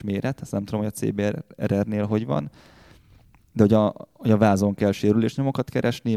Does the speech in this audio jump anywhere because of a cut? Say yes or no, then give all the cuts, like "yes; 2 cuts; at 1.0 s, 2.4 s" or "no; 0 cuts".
no; 0 cuts